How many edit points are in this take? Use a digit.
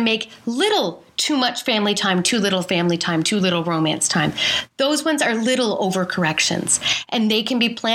1